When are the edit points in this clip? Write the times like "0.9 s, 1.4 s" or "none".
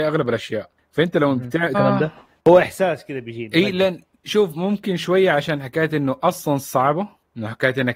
1.7 s